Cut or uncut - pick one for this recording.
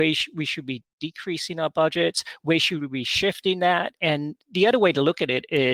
uncut